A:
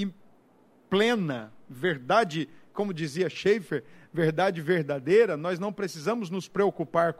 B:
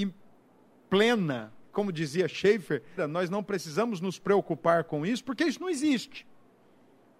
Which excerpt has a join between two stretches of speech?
B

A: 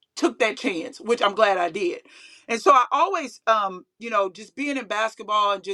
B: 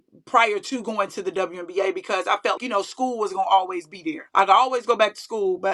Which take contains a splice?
B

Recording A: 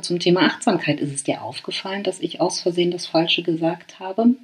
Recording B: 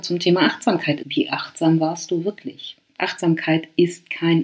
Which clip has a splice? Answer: B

